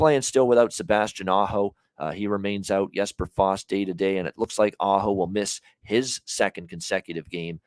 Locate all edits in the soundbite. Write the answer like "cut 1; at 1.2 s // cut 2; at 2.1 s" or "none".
none